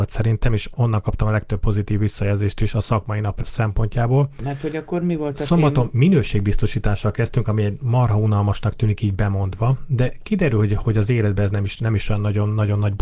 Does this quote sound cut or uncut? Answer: uncut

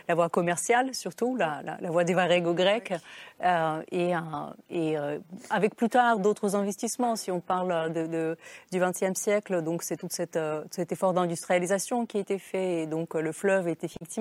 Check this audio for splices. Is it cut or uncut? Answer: uncut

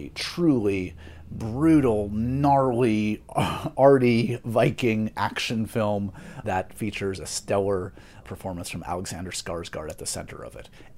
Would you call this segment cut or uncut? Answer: cut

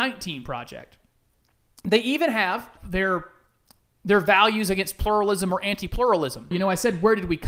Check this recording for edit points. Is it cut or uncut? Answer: cut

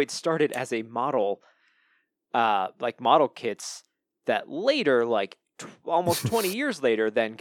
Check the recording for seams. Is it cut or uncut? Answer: uncut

